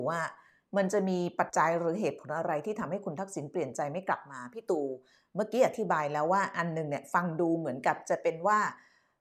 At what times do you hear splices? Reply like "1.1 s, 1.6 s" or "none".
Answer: 1.5 s